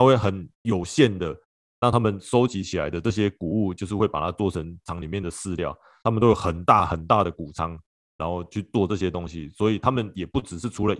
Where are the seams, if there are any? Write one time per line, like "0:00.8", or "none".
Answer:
0:01.6

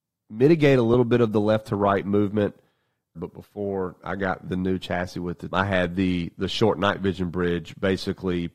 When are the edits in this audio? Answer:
0:03.1
0:05.5

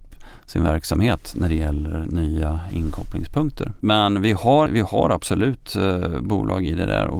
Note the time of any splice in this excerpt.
0:04.7

